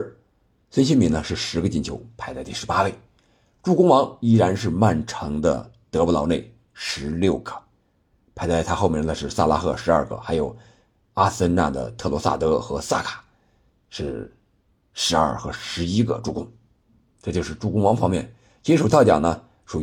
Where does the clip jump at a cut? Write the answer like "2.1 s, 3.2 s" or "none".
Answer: none